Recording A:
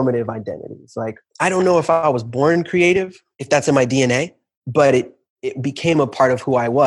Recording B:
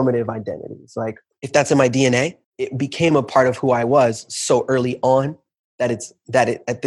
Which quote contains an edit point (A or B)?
B